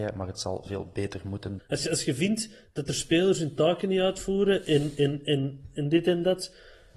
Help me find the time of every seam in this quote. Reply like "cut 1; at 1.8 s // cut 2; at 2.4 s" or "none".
cut 1; at 1.6 s